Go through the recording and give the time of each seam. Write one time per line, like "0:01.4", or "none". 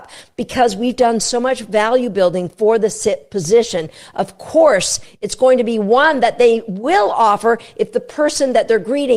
none